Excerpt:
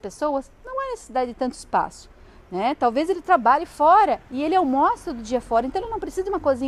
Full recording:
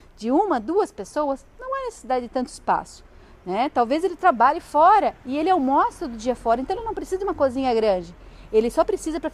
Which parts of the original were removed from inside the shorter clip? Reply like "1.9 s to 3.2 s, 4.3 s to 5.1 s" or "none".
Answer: none